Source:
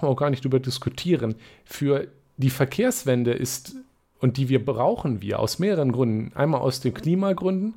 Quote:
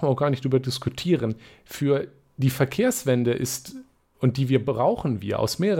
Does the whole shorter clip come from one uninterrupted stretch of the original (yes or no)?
yes